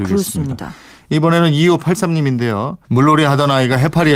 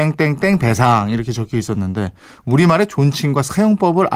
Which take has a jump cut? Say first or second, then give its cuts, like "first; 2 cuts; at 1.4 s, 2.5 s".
first; 1 cut; at 2.8 s